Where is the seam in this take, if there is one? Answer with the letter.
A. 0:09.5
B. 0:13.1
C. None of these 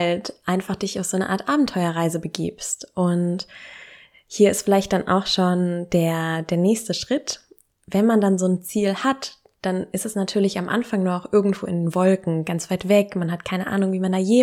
C